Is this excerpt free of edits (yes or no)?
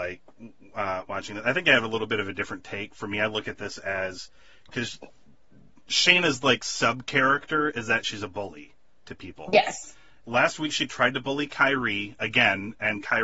no